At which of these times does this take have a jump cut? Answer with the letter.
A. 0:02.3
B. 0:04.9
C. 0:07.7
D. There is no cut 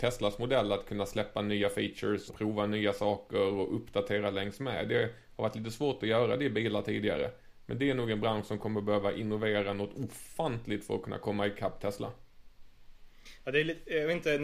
A